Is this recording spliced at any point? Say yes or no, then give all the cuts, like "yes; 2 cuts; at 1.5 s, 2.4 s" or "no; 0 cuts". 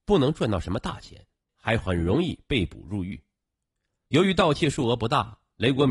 yes; 2 cuts; at 1.5 s, 4.1 s